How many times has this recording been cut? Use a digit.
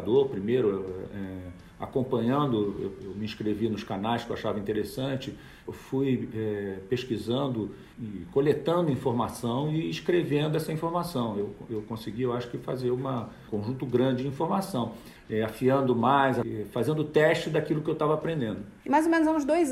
2